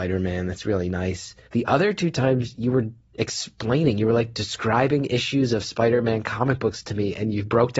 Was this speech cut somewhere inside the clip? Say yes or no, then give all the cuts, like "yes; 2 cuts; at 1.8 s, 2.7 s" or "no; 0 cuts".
yes; 1 cut; at 1.5 s